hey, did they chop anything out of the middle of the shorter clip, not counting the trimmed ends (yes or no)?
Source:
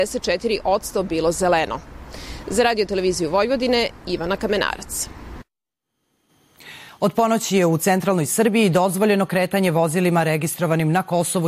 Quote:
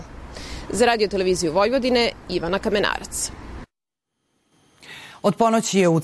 no